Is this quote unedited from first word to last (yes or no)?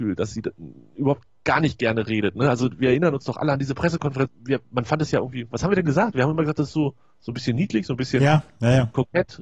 no